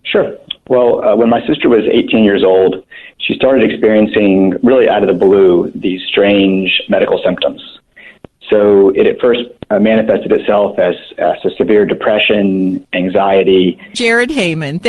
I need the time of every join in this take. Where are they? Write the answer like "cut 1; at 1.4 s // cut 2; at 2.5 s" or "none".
cut 1; at 13.9 s